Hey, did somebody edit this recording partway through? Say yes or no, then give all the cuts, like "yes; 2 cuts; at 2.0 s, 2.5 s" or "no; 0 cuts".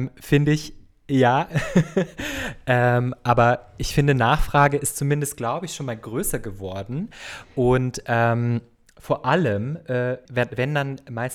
yes; 1 cut; at 10.2 s